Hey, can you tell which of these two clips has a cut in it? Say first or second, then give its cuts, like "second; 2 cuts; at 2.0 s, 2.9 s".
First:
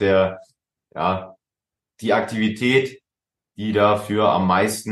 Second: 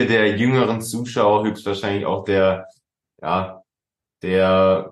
first; 1 cut; at 1.9 s